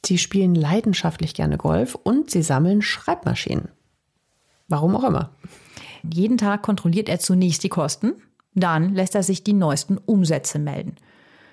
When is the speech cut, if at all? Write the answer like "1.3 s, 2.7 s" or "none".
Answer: 6.0 s